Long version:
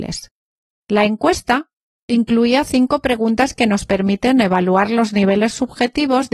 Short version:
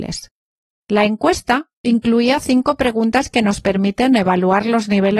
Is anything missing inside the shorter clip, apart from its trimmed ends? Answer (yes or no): yes